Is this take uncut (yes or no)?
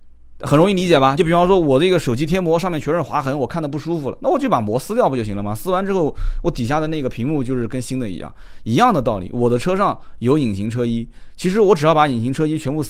yes